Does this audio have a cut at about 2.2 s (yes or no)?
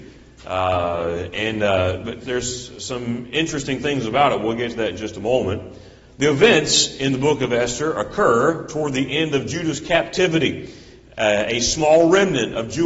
yes